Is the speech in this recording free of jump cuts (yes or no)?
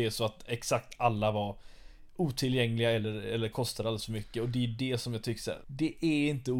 no